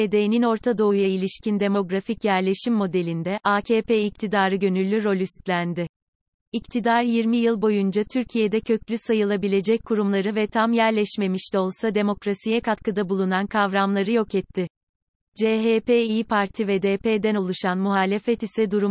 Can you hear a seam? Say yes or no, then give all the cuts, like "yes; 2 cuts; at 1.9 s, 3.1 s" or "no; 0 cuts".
no; 0 cuts